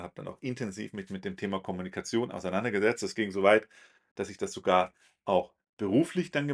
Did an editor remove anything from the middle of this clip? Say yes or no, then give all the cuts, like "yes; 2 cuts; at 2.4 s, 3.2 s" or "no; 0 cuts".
no; 0 cuts